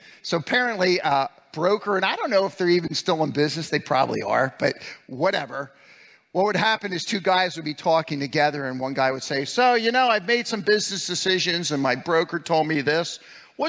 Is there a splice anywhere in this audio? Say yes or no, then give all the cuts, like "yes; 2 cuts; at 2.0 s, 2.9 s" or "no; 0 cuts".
no; 0 cuts